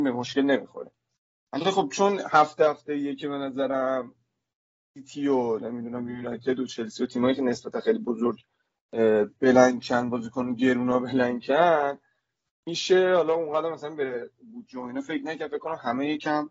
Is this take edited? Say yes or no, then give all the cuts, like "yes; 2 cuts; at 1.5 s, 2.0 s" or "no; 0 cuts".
no; 0 cuts